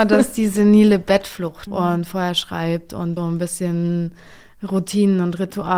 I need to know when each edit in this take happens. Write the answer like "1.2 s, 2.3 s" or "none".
1.7 s, 3.2 s